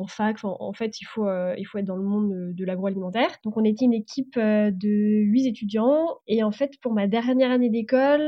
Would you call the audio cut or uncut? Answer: cut